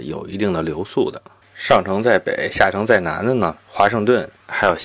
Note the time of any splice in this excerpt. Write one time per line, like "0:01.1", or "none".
0:01.4
0:03.6